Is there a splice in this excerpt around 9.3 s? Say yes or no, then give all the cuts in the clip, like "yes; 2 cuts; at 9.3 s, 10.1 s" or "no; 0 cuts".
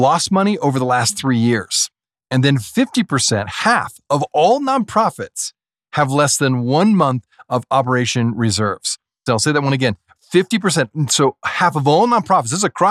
yes; 1 cut; at 9.3 s